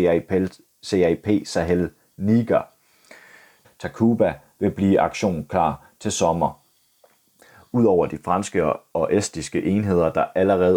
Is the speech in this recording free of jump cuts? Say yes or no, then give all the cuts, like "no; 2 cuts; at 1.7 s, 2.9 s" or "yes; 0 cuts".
no; 1 cut; at 3.6 s